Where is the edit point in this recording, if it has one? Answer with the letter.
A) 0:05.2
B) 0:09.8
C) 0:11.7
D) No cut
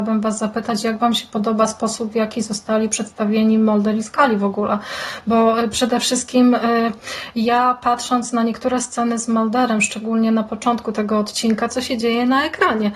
C